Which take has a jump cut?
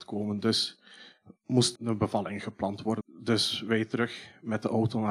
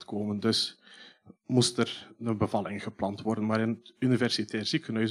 first; 2 cuts; at 1.7 s, 3.0 s

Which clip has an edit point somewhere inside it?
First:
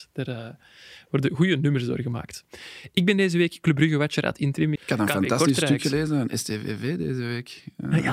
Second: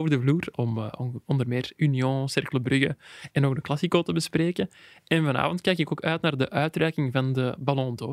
first; 1 cut; at 4.8 s

